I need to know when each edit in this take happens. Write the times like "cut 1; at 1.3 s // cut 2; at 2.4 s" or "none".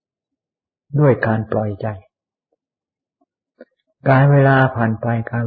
none